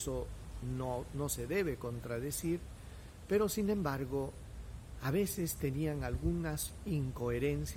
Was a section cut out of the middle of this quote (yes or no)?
no